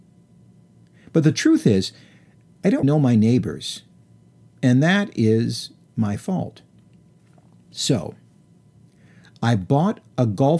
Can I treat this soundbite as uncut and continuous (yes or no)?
no